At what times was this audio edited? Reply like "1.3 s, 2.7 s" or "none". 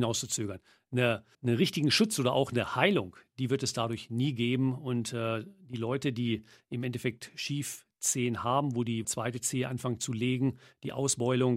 1.3 s, 9.0 s